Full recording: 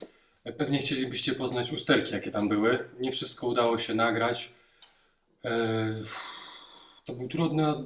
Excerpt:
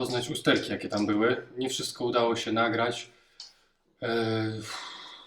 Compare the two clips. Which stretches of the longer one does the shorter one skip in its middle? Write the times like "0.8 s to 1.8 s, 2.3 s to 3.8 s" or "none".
none

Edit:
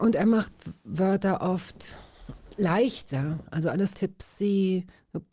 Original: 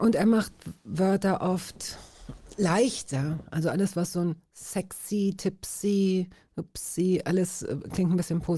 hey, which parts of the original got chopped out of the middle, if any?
3.9 s to 5.4 s

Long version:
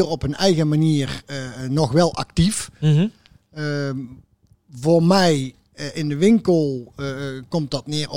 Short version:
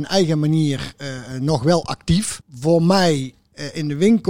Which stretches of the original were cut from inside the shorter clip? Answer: 2.7 s to 4.6 s

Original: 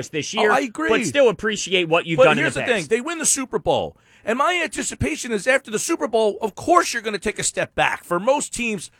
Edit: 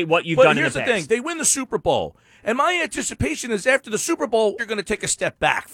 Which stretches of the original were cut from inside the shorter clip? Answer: 6.4 s to 6.9 s

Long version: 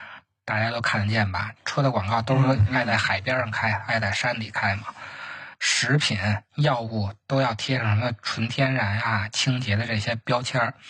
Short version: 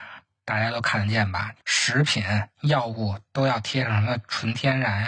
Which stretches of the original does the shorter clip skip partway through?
1.6 s to 5.6 s

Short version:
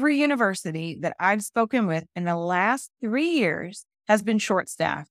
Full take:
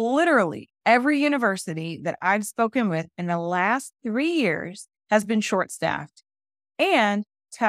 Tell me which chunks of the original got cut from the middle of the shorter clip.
none

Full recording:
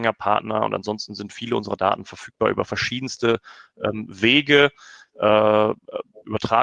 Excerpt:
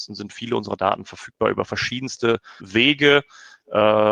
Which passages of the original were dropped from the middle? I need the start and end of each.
3.6 s to 4.1 s

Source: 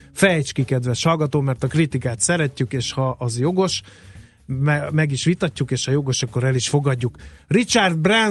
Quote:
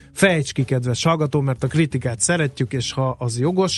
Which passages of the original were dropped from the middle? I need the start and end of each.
none

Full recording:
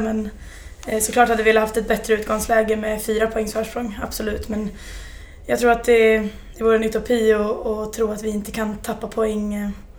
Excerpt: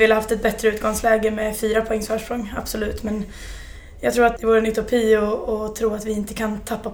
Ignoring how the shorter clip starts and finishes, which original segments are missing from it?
5.8 s to 6.5 s

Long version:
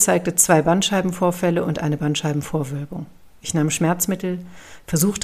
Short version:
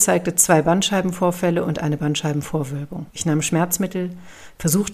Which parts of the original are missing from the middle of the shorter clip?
3.1 s to 3.4 s

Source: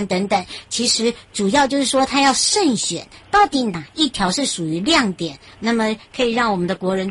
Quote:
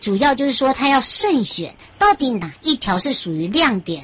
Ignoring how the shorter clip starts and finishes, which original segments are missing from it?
none

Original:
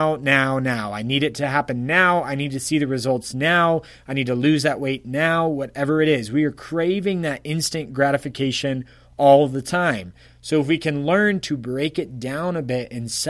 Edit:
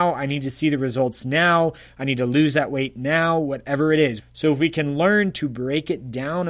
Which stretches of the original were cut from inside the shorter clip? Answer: 6.3 s to 10.3 s

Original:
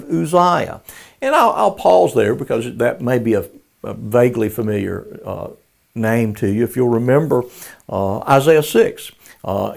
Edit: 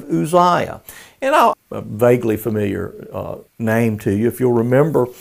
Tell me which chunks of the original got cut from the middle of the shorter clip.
1.5 s to 3.7 s, 5.6 s to 5.8 s

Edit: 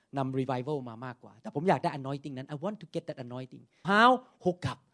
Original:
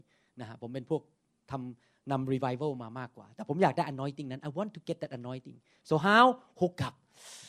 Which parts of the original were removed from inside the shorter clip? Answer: 5.8 s to 6.0 s

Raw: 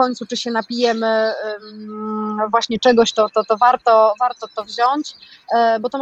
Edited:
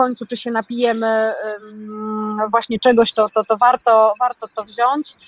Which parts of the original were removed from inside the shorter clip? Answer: none

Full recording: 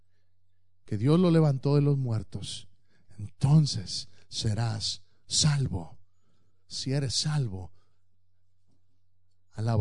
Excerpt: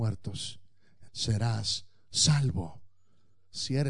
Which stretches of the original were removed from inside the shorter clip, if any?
3.2 s to 4.2 s

